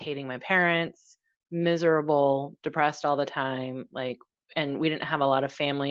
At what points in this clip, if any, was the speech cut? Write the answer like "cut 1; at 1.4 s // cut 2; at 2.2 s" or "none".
none